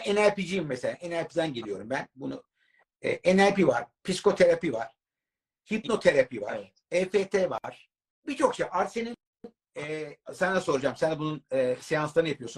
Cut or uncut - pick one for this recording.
cut